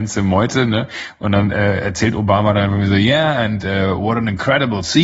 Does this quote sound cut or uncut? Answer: uncut